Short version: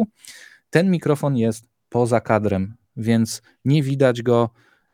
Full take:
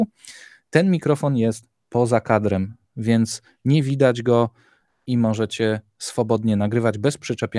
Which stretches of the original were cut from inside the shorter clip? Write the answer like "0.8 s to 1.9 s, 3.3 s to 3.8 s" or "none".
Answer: none